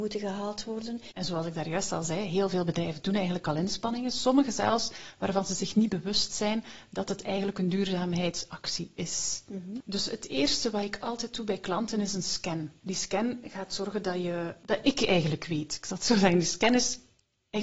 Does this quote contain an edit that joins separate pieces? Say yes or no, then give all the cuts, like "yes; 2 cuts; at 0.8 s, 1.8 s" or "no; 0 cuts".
yes; 1 cut; at 1.1 s